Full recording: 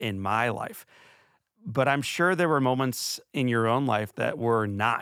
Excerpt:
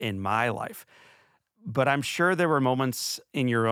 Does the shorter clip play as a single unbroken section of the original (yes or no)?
yes